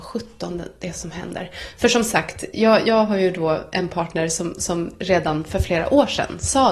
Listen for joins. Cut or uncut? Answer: uncut